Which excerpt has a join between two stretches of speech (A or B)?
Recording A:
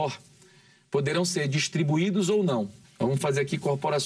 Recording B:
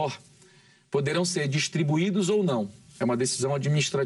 A